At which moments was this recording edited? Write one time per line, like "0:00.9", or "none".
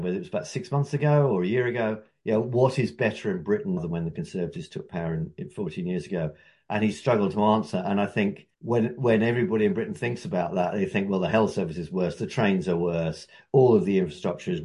0:03.8
0:08.5